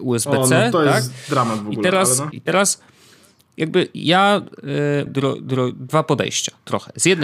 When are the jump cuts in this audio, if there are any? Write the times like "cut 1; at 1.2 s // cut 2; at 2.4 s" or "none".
cut 1; at 2.3 s // cut 2; at 5.1 s